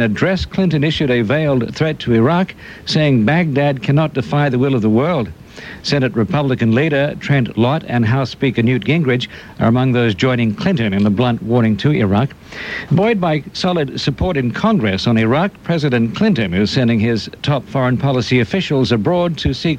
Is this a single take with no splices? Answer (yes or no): no